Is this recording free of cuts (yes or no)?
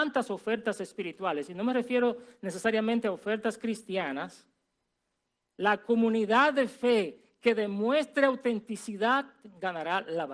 yes